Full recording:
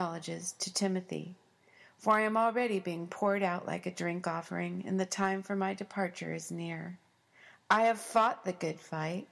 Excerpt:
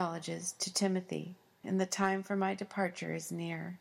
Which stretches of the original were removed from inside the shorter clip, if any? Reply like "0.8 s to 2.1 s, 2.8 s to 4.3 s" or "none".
1.6 s to 4.8 s